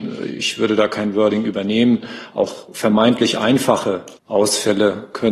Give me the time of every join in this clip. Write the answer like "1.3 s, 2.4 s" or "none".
4.2 s